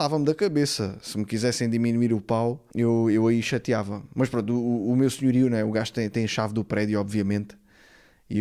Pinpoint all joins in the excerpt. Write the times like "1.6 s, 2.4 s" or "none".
2.7 s